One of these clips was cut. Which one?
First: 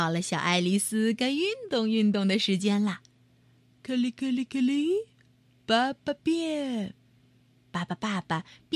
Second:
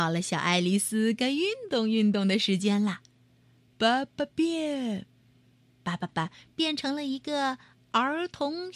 second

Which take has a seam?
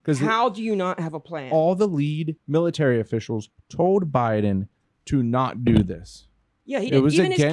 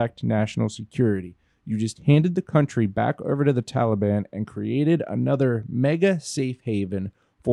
first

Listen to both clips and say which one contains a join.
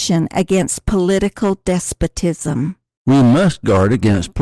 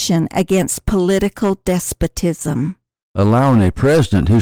second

